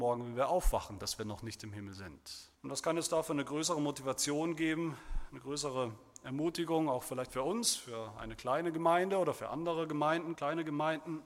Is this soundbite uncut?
no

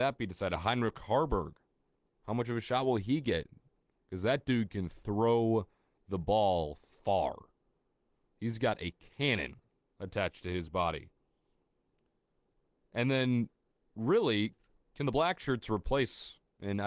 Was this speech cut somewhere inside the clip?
no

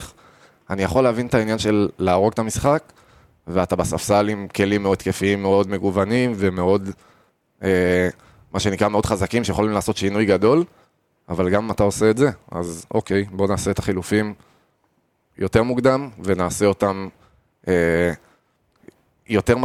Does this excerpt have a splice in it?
no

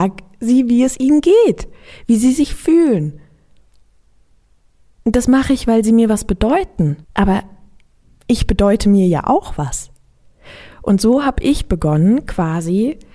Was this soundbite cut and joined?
yes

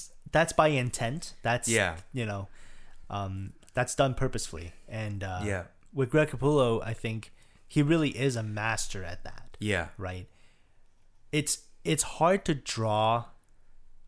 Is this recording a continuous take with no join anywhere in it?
yes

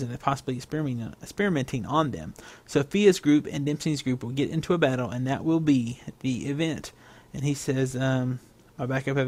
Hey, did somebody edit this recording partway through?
no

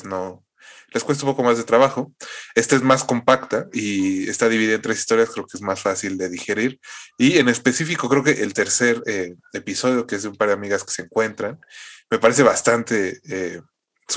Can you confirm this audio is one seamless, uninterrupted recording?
yes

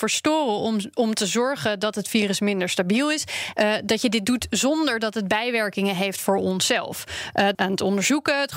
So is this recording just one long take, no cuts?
no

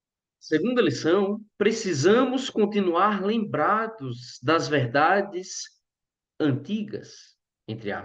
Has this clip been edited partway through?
yes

